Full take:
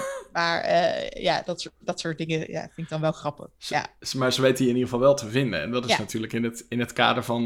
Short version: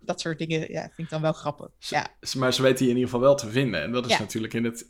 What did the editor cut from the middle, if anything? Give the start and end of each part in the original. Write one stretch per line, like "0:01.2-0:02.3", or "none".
none